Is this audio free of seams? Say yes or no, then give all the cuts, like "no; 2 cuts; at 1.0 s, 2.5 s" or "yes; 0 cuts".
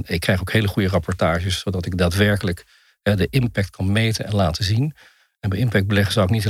yes; 0 cuts